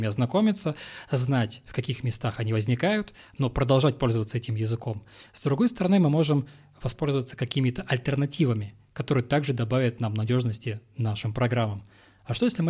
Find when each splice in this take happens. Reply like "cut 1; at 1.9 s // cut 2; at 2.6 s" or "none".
none

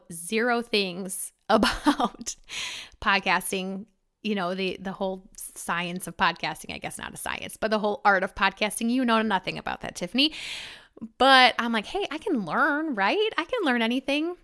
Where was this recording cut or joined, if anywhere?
none

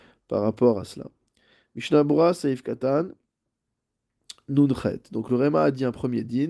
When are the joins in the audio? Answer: none

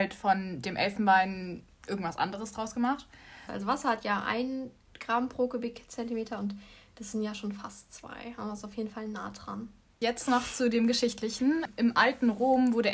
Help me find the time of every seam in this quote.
cut 1; at 3.5 s

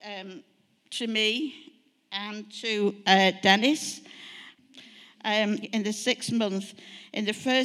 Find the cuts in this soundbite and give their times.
cut 1; at 4.6 s // cut 2; at 5.6 s

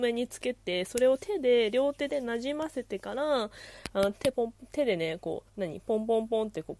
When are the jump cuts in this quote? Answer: cut 1; at 4.3 s // cut 2; at 5.5 s

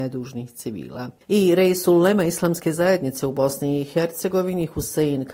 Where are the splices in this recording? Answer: cut 1; at 1.2 s

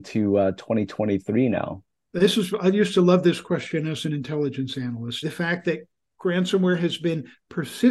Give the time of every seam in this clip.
cut 1; at 5.2 s

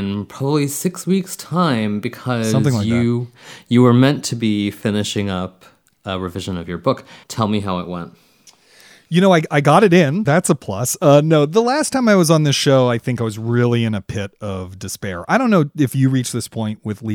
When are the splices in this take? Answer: cut 1; at 7.2 s // cut 2; at 10.2 s

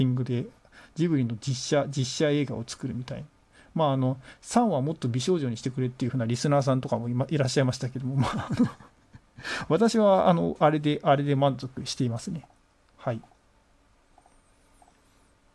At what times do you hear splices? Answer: none

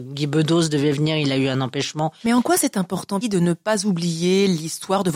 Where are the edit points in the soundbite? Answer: cut 1; at 2.2 s // cut 2; at 3.2 s

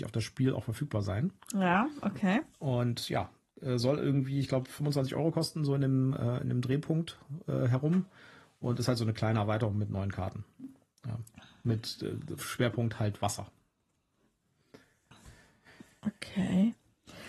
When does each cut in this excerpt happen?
none

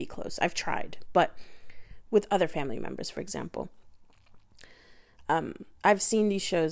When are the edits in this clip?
cut 1; at 5.8 s

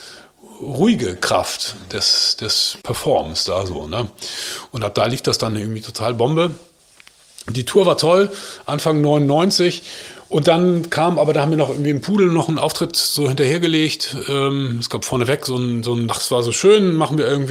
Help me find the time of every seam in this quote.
cut 1; at 2.8 s // cut 2; at 16.1 s

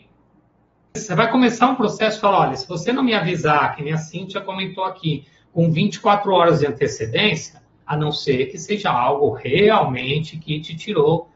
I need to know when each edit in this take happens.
cut 1; at 0.9 s // cut 2; at 7.8 s

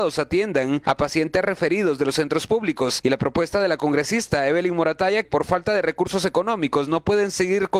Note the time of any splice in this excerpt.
cut 1; at 5.2 s

